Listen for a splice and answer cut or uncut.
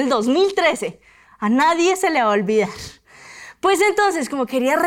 uncut